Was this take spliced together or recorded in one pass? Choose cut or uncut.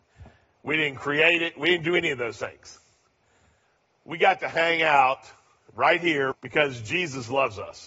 cut